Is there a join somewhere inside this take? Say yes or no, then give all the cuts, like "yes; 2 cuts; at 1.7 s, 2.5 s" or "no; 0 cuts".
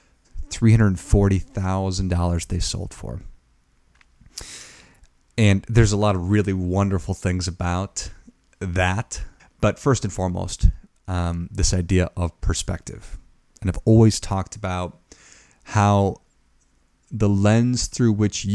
yes; 1 cut; at 9.4 s